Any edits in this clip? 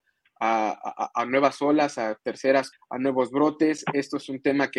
yes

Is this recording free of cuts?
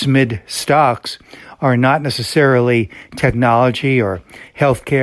yes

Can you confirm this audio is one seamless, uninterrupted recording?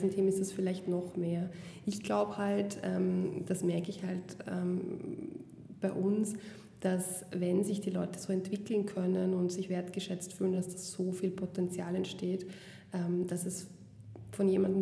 yes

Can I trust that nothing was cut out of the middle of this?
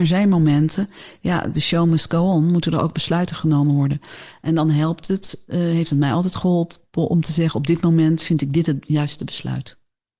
yes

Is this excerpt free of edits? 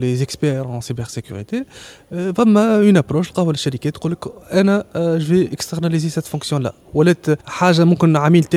no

